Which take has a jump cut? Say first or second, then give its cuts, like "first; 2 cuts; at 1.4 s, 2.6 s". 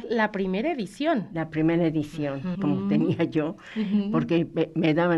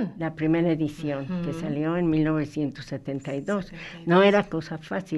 first; 1 cut; at 2.5 s